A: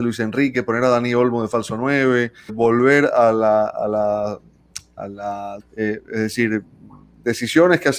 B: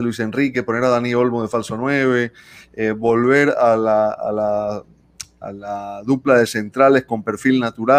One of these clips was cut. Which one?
A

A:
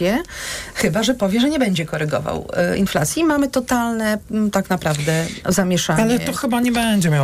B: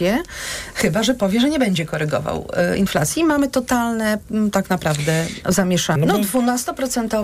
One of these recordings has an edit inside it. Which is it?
B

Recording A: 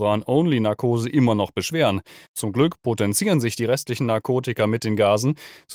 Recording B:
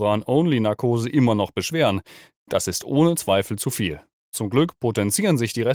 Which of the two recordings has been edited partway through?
A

